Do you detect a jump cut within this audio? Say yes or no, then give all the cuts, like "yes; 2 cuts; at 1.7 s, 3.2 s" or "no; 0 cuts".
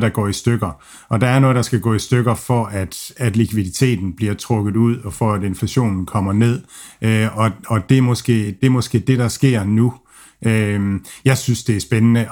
no; 0 cuts